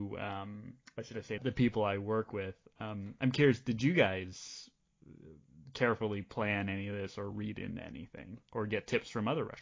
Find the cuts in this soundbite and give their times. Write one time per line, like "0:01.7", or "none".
0:01.4